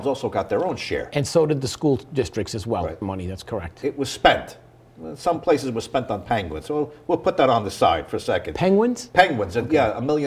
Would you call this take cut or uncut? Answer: cut